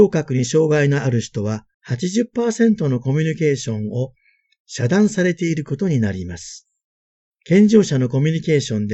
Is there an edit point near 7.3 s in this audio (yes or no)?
yes